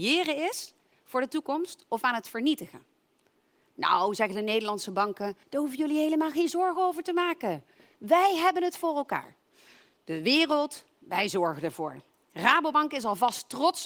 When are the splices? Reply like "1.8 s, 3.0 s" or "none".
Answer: 5.4 s